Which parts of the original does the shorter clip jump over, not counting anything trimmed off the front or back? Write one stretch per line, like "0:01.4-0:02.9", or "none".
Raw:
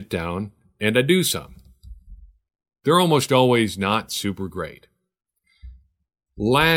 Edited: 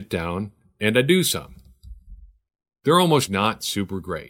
0:03.3-0:03.8